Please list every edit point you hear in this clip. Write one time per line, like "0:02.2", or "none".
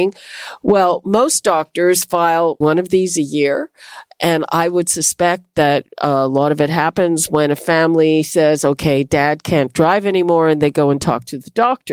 0:02.6